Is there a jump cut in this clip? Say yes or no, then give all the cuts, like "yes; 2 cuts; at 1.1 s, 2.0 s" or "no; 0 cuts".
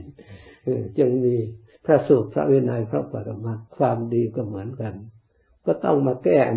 yes; 1 cut; at 3.7 s